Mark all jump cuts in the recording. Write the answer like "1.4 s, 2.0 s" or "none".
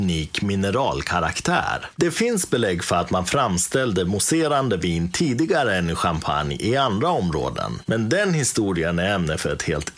2.0 s